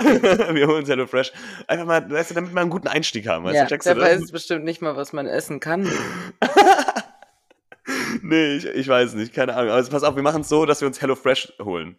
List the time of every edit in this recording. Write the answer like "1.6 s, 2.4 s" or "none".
3.6 s

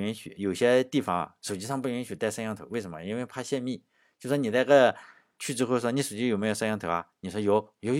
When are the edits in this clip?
5.4 s

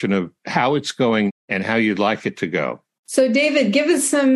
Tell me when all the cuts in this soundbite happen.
1.3 s, 3.0 s

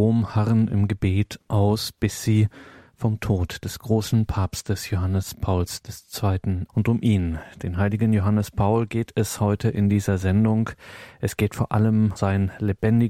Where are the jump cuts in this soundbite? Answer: 6.7 s, 12.2 s

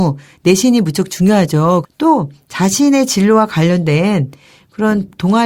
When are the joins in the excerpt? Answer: 1.8 s

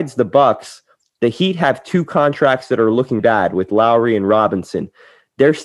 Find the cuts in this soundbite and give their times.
3.2 s

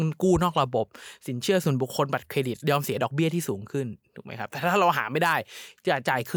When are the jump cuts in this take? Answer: none

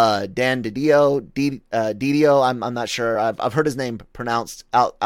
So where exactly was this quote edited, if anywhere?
none

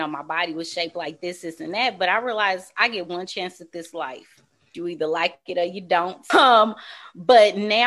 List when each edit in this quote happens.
4.7 s, 6.3 s

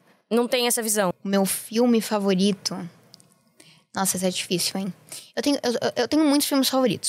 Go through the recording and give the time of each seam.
1.1 s

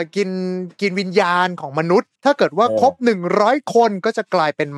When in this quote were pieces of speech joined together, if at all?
2.2 s

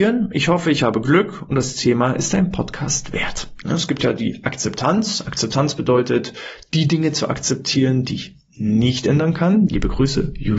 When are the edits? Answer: 3.6 s, 9.7 s

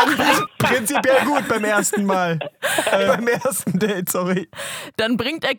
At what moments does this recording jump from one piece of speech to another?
3.1 s

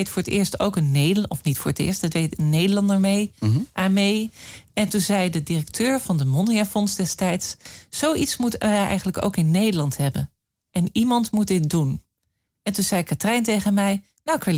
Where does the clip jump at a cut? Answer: none

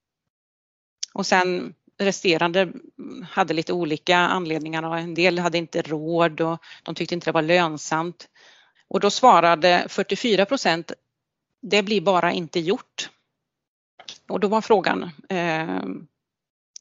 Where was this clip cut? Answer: 8.7 s, 14.3 s

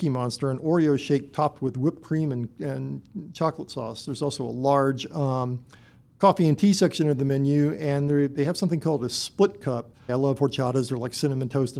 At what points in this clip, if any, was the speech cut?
10.1 s

